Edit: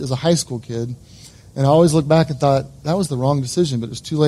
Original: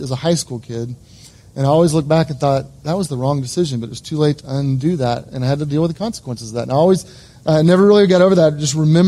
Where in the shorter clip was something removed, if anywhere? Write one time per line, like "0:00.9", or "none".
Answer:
none